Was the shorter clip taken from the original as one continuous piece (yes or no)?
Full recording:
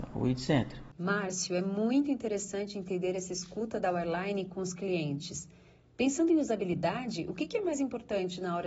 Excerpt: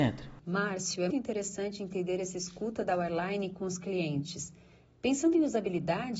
no